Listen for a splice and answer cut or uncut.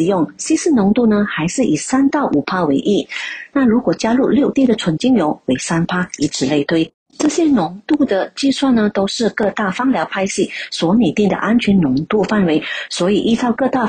cut